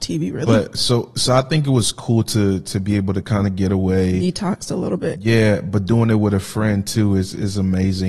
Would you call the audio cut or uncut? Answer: uncut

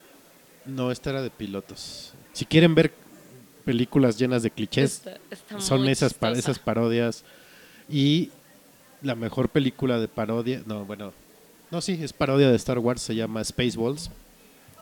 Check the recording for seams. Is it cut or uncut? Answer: cut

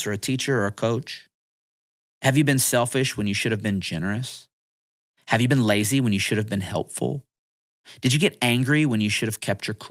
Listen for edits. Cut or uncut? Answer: uncut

